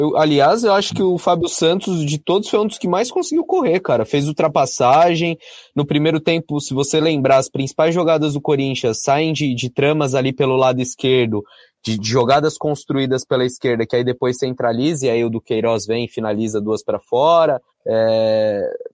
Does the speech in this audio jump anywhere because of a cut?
yes; 1 cut; at 17.7 s

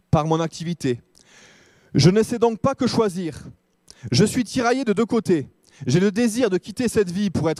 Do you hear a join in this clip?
no; 0 cuts

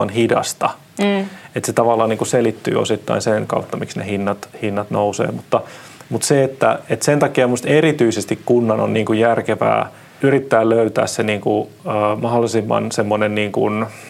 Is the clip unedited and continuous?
yes; 0 cuts

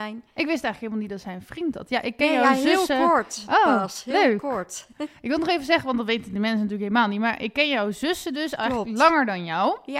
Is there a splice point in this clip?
no; 0 cuts

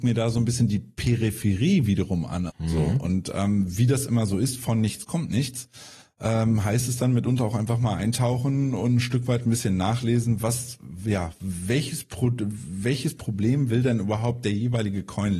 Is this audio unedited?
no; 1 cut; at 2.5 s

